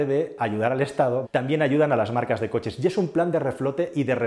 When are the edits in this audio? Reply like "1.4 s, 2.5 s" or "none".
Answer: 1.2 s